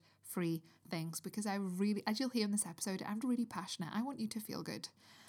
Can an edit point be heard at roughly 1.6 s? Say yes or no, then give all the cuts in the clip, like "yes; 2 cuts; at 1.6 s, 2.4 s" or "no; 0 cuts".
no; 1 cut; at 3.2 s